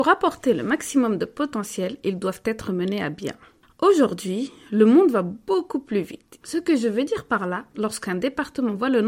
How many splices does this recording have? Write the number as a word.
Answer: two